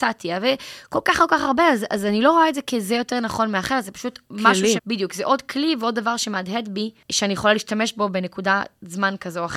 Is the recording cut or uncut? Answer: cut